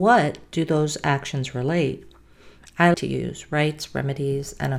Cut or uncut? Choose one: cut